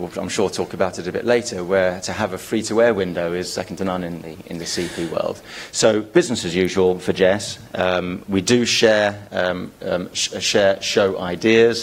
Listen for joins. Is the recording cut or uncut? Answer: cut